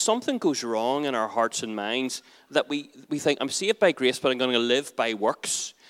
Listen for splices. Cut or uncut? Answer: uncut